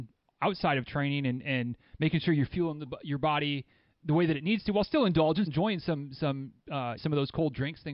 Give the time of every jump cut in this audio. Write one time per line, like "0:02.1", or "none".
0:05.5
0:07.0